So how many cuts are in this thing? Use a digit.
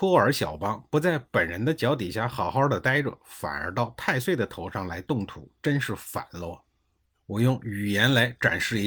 1